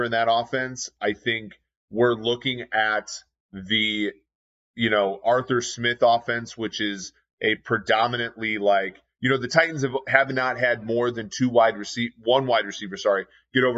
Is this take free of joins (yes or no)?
yes